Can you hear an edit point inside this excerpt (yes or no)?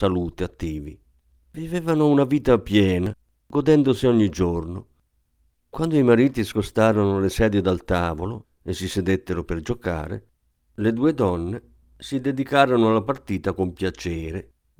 no